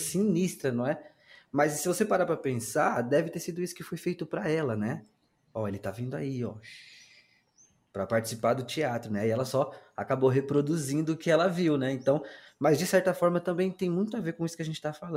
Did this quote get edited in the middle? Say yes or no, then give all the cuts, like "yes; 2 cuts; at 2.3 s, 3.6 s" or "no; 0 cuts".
no; 0 cuts